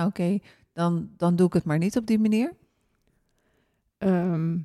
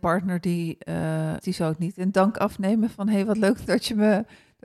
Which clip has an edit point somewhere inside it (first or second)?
second